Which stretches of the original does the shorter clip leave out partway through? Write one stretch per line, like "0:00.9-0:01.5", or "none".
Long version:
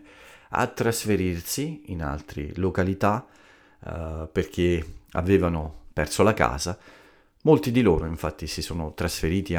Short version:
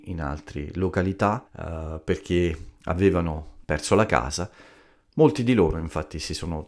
0:03.3-0:03.8